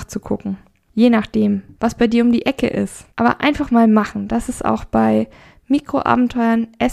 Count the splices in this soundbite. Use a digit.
2